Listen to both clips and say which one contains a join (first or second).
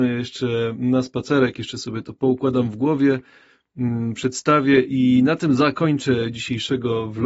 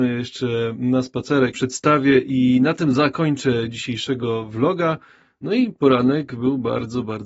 second